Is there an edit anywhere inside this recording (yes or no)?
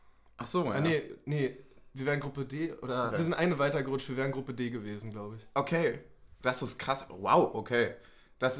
yes